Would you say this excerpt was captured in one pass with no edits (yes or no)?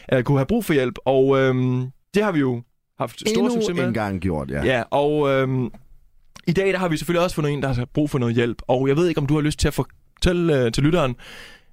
yes